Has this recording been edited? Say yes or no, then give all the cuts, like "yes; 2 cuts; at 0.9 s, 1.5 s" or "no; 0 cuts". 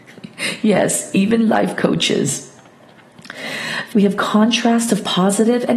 yes; 1 cut; at 3.9 s